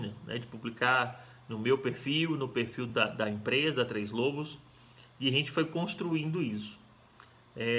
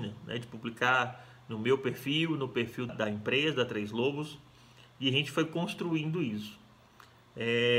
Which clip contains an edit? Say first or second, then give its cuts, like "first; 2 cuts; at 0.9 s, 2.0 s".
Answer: second; 1 cut; at 2.9 s